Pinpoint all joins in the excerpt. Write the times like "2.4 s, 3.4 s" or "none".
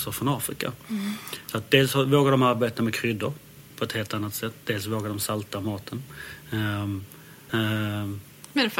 7.5 s

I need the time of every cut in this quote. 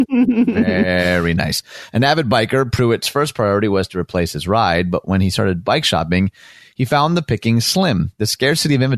none

